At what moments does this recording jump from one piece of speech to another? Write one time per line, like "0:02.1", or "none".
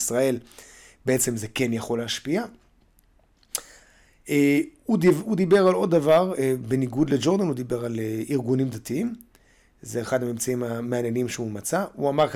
none

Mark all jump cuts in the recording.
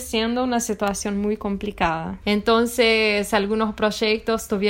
0:02.2

